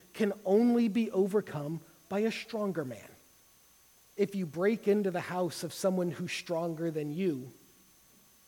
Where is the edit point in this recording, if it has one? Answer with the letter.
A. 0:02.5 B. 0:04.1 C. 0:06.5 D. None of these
B